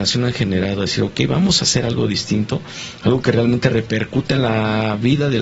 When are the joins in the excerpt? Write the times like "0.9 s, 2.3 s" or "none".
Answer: none